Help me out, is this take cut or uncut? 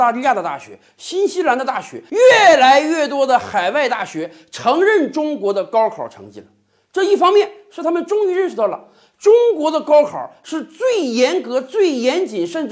uncut